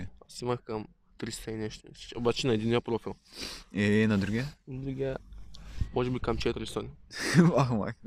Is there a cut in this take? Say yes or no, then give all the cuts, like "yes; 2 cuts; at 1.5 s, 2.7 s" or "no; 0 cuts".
no; 0 cuts